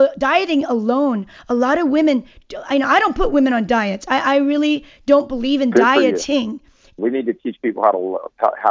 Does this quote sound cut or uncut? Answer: cut